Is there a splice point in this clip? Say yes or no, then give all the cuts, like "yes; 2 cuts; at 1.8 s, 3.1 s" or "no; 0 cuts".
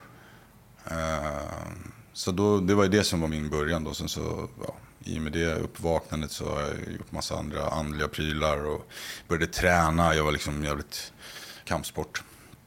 yes; 2 cuts; at 3.3 s, 11.7 s